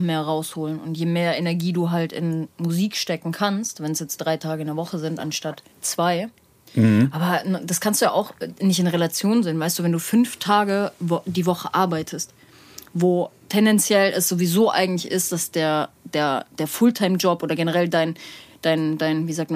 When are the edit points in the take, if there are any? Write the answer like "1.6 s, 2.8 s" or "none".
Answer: 5.7 s